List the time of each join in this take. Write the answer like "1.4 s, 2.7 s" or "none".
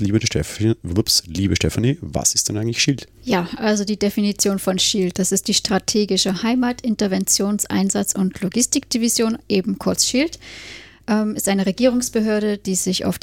3.2 s